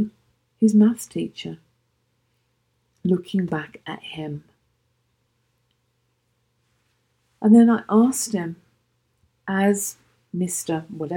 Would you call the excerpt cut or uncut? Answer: uncut